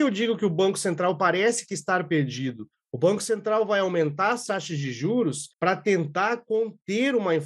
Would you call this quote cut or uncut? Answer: cut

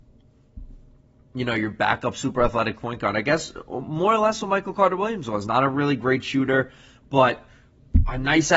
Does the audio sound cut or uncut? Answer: uncut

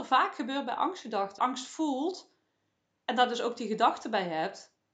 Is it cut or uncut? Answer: cut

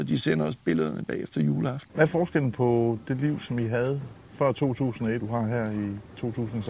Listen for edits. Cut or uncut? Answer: cut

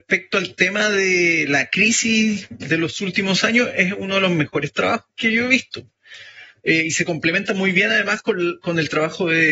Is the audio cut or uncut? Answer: uncut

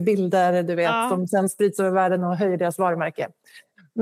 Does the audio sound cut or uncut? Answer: uncut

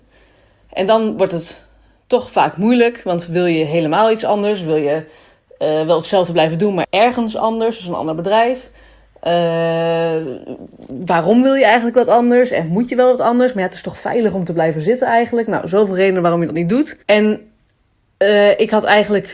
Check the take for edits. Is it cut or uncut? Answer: cut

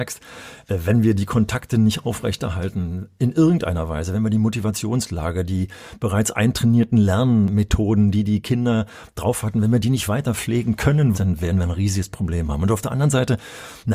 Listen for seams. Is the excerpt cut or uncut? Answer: cut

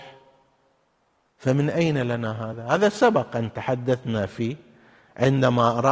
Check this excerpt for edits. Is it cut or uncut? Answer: uncut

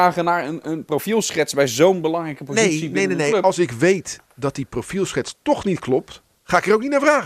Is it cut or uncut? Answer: uncut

